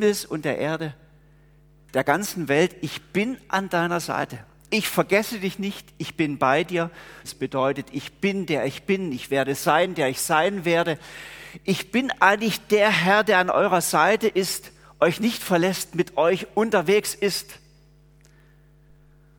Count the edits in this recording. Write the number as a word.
one